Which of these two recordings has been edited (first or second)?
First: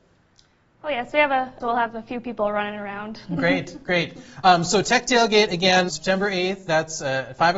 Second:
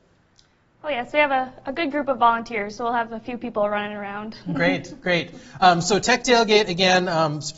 first